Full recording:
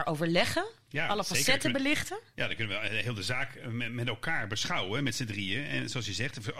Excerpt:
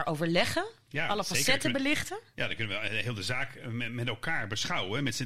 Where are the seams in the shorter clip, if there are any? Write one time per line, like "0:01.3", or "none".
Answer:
none